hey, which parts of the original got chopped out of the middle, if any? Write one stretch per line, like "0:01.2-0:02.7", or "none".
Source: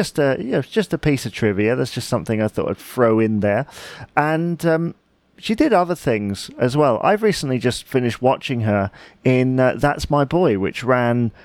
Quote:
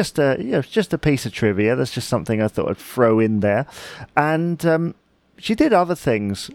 none